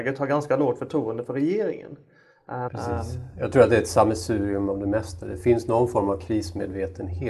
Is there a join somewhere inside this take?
yes; 1 cut; at 2.7 s

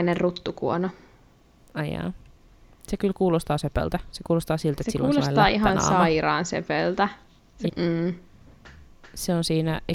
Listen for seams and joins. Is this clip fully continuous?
no; 1 cut; at 7.7 s

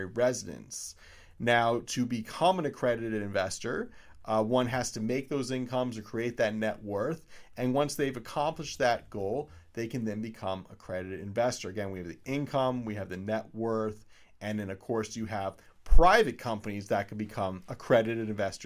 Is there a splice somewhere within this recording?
no; 0 cuts

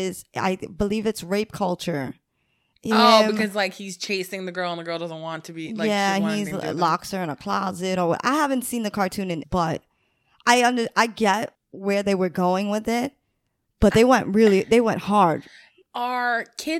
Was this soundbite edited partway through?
yes; 1 cut; at 9.4 s

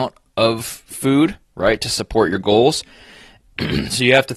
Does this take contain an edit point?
yes; 1 cut; at 3.4 s

